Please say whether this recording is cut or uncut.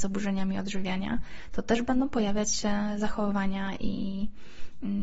uncut